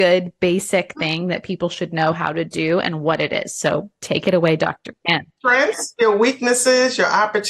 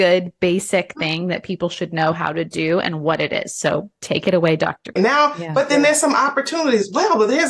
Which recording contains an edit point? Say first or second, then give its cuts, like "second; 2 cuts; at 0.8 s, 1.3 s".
second; 1 cut; at 5.0 s